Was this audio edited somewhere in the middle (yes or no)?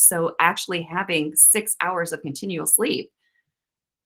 no